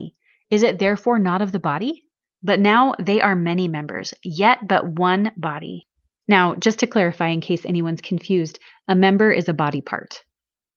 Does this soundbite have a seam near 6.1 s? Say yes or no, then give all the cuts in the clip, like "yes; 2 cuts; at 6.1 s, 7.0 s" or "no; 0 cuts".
no; 1 cut; at 2.3 s